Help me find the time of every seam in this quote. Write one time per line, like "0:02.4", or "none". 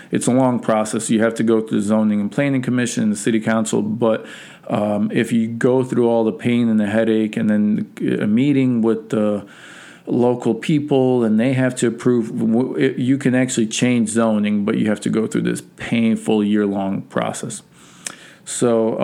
none